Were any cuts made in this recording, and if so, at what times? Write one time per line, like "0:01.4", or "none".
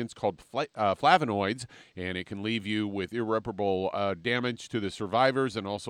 0:01.8